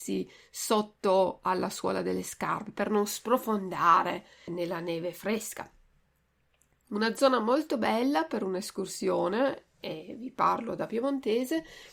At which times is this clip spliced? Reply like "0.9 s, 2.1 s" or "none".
4.5 s